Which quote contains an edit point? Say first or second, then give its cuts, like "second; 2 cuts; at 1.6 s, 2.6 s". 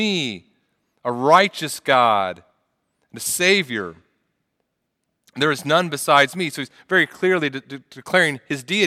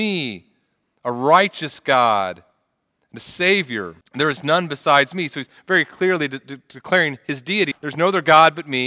second; 2 cuts; at 4.0 s, 7.7 s